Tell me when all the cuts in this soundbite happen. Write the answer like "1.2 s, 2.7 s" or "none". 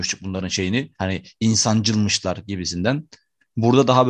none